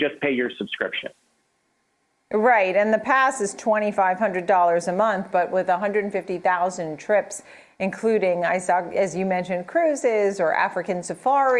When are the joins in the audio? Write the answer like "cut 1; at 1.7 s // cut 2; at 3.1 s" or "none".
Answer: none